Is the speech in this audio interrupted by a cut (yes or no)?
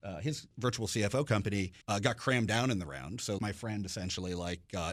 yes